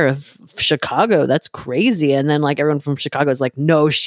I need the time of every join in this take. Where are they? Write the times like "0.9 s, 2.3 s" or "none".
none